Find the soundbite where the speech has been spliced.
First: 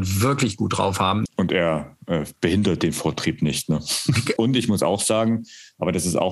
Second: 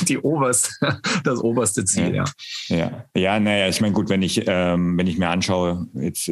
first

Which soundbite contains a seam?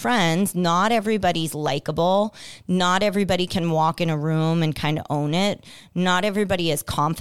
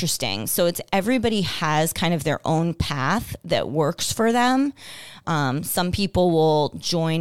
second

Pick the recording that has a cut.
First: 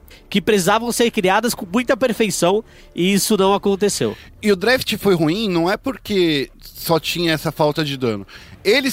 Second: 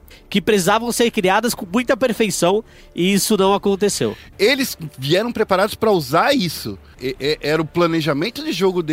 second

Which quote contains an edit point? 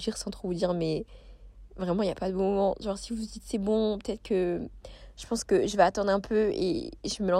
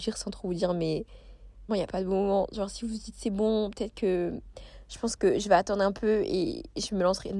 second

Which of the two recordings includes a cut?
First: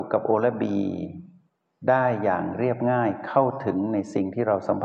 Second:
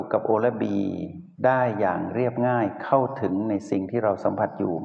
second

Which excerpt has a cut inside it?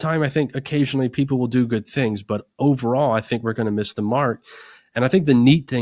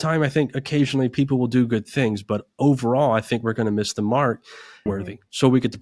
second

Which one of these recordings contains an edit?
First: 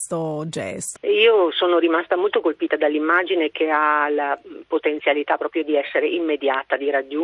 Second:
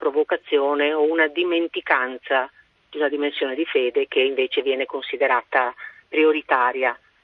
first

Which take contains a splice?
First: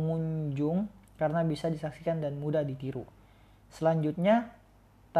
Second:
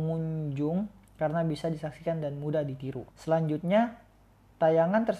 second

